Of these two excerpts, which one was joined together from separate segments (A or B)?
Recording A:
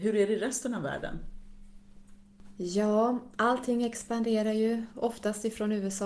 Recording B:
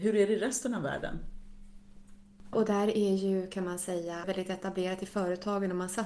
B